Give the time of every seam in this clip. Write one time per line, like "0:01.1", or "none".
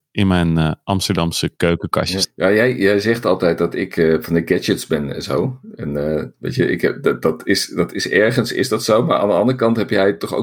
0:02.2